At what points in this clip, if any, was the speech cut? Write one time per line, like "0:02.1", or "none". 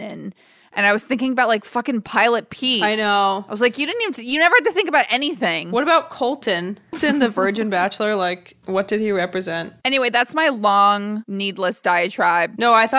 0:06.9